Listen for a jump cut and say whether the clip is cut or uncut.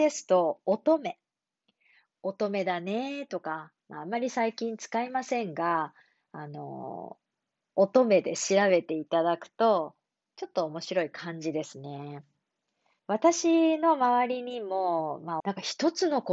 cut